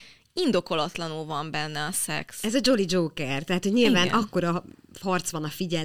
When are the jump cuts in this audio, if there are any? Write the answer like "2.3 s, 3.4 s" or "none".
none